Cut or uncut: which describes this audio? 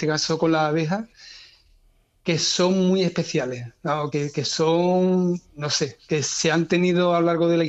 uncut